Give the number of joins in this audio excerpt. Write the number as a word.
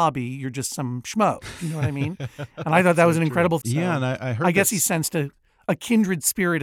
one